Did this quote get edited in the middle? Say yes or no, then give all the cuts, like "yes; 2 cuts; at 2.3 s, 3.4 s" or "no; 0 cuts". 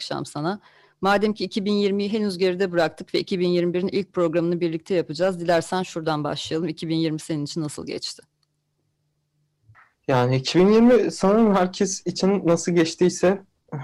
no; 0 cuts